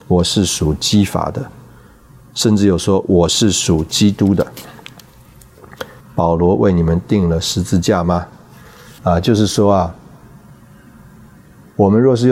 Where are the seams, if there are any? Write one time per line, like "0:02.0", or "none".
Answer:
0:06.0
0:09.0